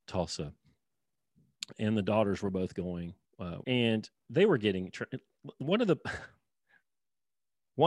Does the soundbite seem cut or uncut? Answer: cut